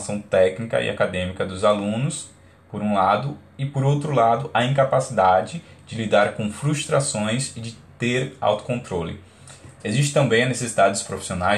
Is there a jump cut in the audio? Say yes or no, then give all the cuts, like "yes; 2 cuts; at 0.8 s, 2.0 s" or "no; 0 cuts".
yes; 1 cut; at 9.8 s